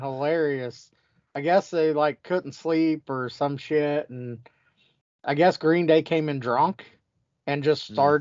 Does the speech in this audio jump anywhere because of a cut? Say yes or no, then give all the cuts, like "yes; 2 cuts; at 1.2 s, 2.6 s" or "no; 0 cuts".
no; 0 cuts